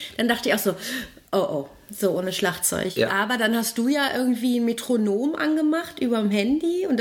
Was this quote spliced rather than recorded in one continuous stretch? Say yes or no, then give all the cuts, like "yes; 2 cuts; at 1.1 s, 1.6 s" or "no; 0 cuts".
no; 0 cuts